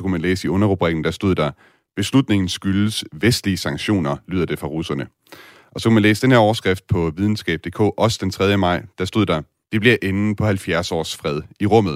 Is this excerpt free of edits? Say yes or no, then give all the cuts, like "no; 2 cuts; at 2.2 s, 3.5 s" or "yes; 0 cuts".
no; 1 cut; at 9.6 s